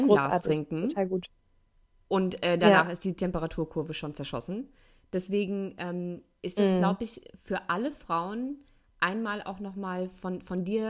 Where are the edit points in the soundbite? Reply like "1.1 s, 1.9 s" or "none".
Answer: none